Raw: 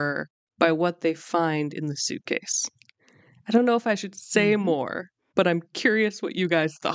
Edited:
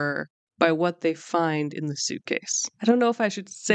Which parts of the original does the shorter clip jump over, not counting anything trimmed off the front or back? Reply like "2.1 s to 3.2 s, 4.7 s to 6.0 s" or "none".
2.7 s to 3.4 s